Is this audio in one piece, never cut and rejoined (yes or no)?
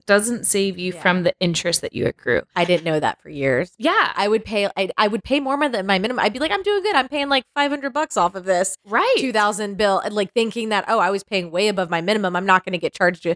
yes